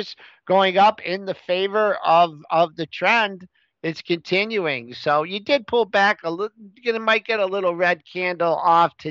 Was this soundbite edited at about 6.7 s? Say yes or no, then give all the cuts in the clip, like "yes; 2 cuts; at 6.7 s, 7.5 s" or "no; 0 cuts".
no; 0 cuts